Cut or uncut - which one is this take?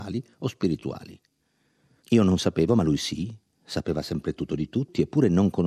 cut